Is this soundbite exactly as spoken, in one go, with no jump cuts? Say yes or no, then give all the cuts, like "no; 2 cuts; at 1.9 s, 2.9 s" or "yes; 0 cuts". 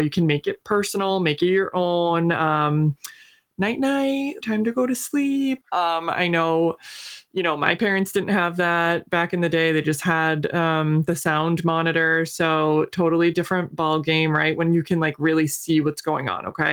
no; 2 cuts; at 4.4 s, 5.6 s